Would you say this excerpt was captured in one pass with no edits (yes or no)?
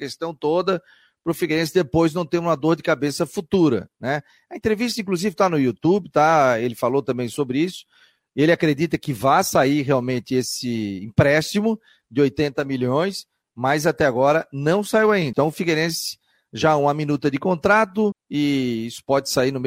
no